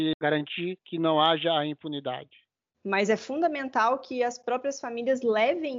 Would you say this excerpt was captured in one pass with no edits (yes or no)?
no